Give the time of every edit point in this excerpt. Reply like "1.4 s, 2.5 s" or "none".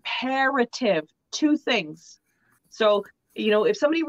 2.6 s